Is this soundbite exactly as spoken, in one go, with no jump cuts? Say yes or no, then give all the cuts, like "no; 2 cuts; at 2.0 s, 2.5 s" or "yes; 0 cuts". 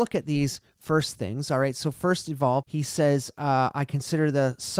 no; 1 cut; at 2.6 s